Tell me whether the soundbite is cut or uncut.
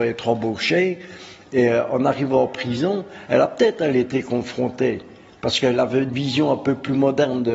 uncut